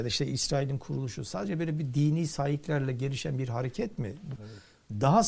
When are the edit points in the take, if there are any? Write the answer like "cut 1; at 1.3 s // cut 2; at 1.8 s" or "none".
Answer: cut 1; at 4.4 s